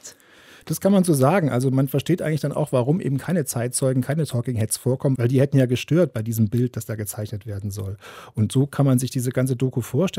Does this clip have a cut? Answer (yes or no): no